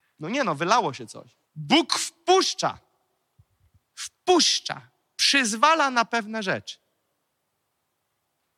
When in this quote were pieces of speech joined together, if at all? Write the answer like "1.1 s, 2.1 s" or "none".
1.5 s